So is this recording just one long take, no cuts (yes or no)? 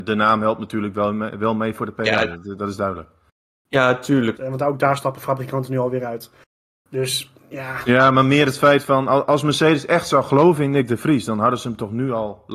no